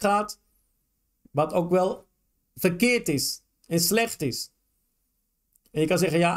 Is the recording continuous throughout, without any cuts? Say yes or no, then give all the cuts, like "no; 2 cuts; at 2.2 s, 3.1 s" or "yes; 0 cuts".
yes; 0 cuts